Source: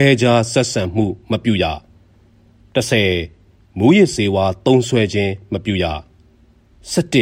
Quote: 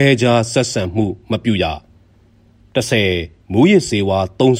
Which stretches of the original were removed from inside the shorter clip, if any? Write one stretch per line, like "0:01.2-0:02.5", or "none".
0:03.4-0:03.7